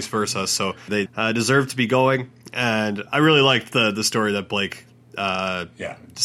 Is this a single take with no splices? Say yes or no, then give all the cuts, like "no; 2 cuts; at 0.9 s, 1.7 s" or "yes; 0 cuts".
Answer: no; 1 cut; at 1.1 s